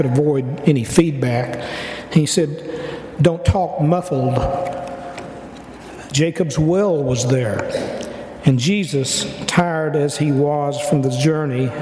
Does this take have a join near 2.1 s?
no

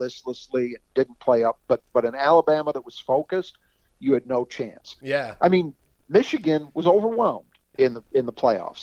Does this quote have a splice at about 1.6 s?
no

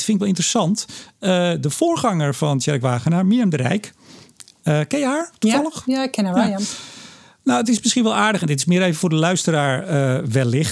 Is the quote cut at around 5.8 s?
no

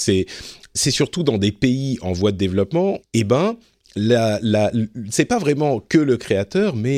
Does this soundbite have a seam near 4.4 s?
no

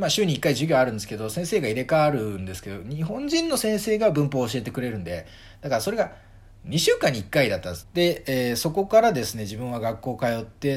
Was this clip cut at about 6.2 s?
no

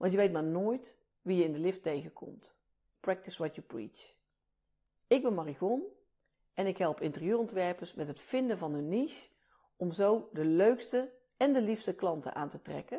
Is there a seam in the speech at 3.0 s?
yes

